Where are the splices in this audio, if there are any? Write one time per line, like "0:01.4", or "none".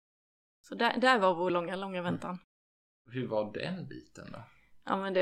none

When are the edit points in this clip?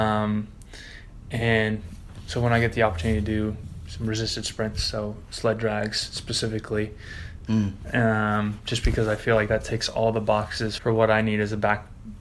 0:07.5
0:10.8

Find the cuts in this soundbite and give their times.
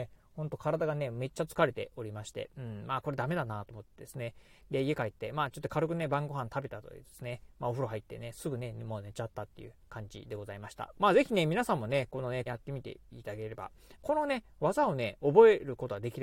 0:10.9
0:12.5
0:14.0

